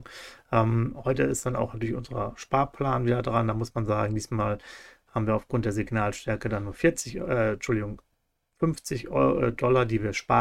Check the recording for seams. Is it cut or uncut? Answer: uncut